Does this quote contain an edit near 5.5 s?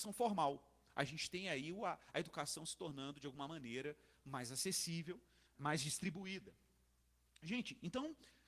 yes; 1 cut; at 5.5 s

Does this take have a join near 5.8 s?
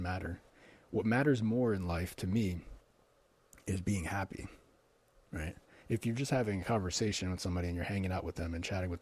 yes; 1 cut; at 5.8 s

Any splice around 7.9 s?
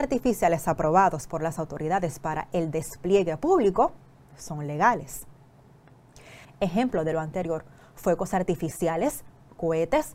no; 1 cut; at 6.4 s

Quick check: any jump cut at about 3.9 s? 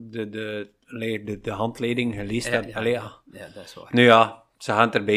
no; 0 cuts

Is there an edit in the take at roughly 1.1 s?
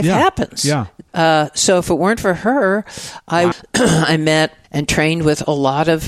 yes; 2 cuts; at 1.1 s, 3.5 s

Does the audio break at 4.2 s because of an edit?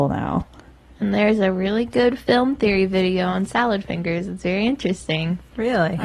no; 0 cuts

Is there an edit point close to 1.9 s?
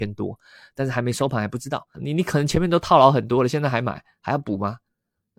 yes; 1 cut; at 1.9 s

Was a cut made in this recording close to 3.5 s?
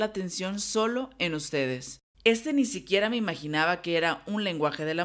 no; 1 cut; at 2.1 s

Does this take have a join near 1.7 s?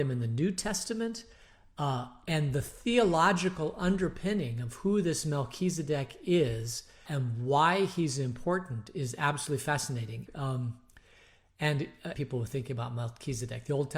no; 3 cuts; at 7.1 s, 10.3 s, 12.1 s

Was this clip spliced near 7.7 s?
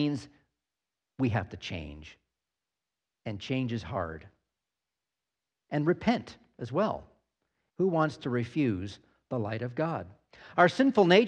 yes; 1 cut; at 7.7 s

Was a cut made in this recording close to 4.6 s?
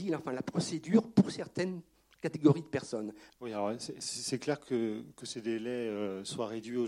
no; 1 cut; at 3.3 s

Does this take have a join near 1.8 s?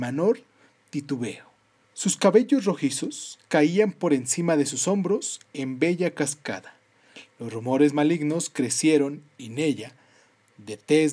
no; 0 cuts

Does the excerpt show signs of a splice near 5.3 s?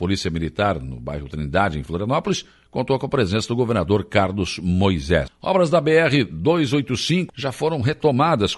yes; 2 cuts; at 5.3 s, 7.3 s

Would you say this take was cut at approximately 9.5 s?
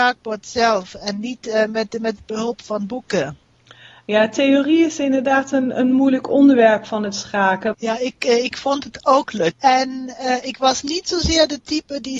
yes; 2 cuts; at 7.7 s, 9.5 s

